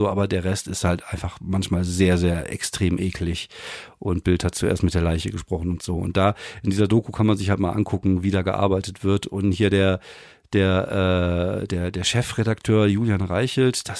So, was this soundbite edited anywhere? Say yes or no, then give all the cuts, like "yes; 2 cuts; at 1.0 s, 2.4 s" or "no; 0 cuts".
no; 0 cuts